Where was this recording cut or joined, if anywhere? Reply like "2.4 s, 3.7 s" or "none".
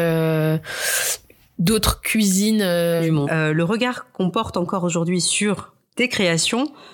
3.2 s